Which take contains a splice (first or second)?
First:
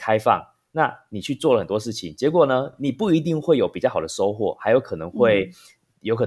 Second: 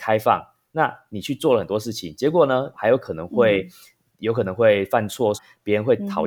second